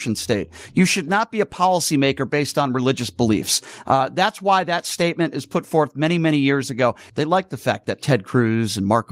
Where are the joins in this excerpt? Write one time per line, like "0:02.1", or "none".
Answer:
0:07.1